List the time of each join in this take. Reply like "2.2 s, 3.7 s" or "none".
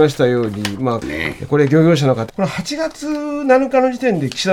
1.0 s, 2.3 s